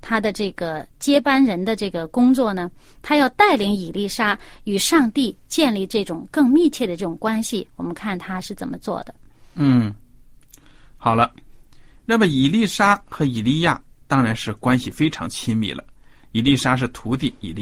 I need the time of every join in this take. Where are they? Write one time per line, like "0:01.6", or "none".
none